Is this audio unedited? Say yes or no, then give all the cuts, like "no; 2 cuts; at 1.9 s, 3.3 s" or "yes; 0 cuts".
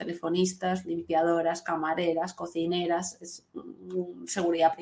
yes; 0 cuts